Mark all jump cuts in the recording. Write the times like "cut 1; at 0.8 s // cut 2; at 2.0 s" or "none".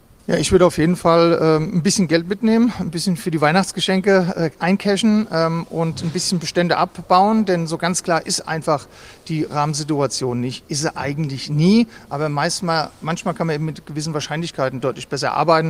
none